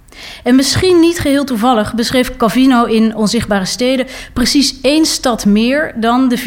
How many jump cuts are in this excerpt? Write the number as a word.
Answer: zero